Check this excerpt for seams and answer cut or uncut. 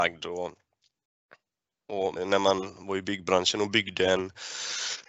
cut